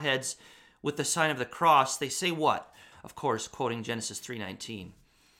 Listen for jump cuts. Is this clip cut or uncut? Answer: cut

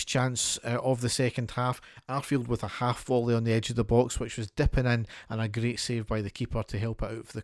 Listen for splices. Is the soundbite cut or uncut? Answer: uncut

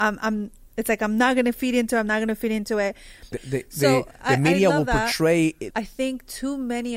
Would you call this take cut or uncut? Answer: cut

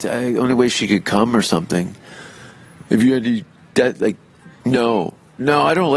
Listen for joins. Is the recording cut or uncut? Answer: cut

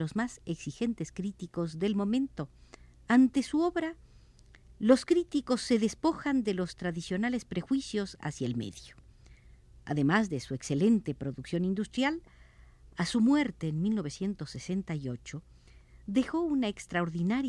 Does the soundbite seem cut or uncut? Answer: cut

